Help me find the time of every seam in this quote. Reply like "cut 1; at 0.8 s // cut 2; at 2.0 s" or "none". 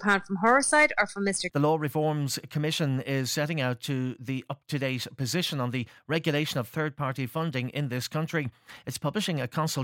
cut 1; at 1.5 s

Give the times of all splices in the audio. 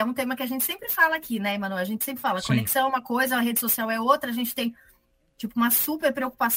none

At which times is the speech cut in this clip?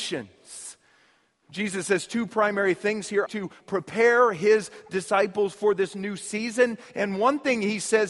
cut 1; at 3.3 s

